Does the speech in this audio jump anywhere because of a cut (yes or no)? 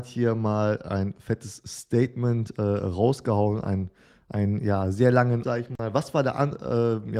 yes